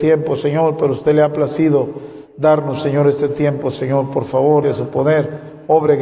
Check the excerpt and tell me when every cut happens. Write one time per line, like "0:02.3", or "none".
0:04.6